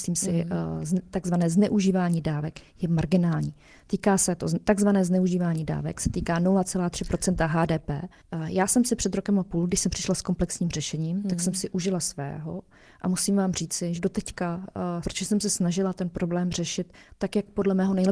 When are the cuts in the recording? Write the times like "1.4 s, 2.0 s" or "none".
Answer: 14.0 s, 15.0 s